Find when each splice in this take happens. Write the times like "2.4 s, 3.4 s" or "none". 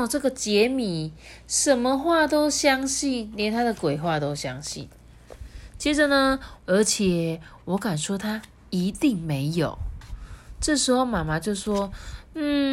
6.6 s